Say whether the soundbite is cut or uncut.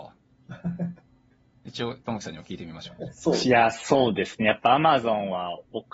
uncut